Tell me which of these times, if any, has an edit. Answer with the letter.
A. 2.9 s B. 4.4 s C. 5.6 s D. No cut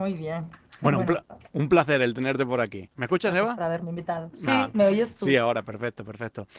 A